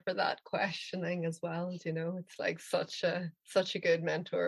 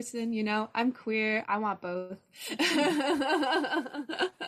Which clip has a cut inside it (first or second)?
second